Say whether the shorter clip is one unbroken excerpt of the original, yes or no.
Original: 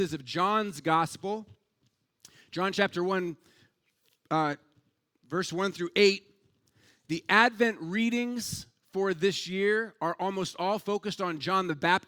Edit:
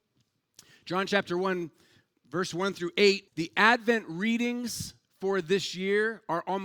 no